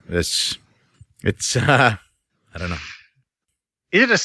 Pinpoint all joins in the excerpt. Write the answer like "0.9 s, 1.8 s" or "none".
none